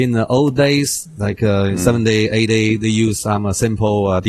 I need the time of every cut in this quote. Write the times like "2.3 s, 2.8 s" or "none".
none

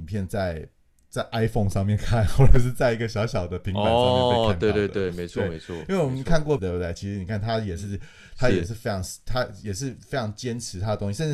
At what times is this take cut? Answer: 6.6 s

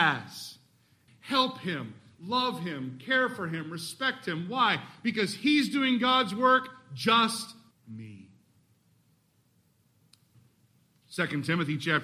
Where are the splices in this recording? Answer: 1.1 s, 7.7 s

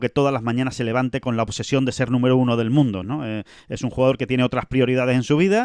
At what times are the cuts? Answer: 3.0 s

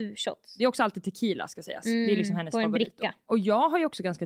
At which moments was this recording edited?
none

